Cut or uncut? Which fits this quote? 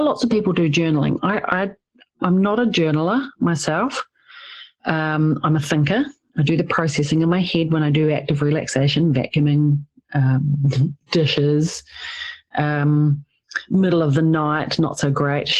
uncut